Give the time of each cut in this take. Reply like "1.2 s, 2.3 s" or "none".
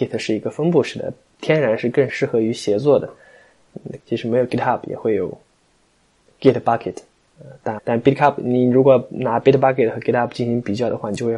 2.1 s, 4.0 s, 7.8 s